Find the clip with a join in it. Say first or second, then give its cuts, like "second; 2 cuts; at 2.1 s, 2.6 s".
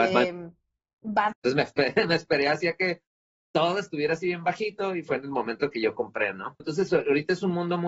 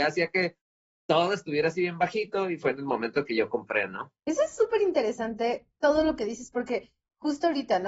first; 2 cuts; at 1.3 s, 6.6 s